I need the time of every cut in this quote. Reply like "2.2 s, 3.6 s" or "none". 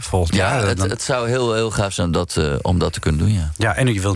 none